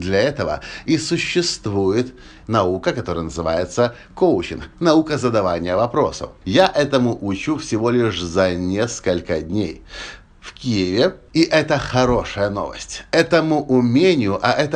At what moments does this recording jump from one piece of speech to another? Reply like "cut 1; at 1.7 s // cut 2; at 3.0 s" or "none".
cut 1; at 6.4 s // cut 2; at 11.3 s